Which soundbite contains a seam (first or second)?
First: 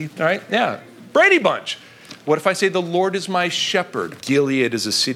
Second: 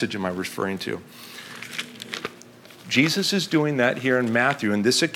first